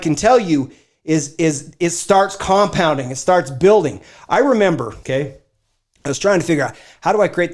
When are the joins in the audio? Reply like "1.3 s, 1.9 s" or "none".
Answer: 5.0 s